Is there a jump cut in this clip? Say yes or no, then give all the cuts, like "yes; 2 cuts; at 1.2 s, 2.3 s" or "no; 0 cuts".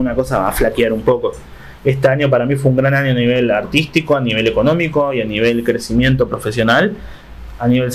no; 0 cuts